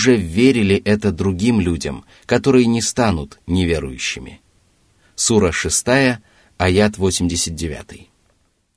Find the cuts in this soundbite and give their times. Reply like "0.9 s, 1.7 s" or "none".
none

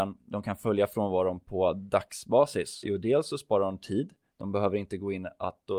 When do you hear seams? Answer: 2.8 s

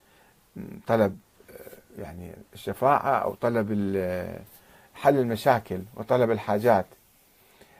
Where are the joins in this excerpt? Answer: none

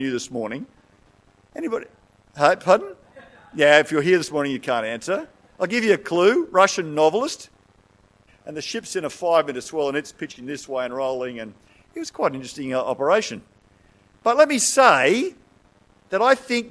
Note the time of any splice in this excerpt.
8.3 s

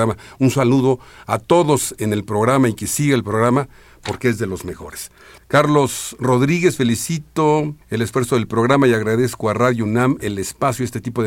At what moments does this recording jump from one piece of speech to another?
5.4 s, 7.8 s

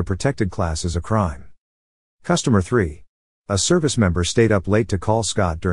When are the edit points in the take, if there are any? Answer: 3.3 s

